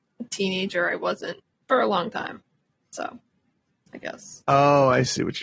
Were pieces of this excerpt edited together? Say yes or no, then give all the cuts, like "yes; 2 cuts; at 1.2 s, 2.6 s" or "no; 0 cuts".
yes; 2 cuts; at 1.5 s, 4.4 s